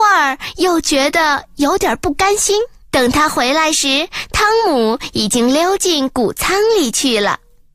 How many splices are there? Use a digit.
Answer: 1